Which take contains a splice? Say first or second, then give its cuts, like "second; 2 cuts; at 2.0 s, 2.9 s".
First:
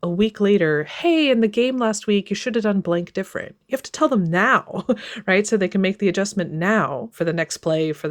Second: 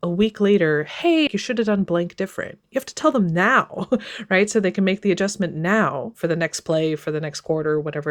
second; 1 cut; at 1.3 s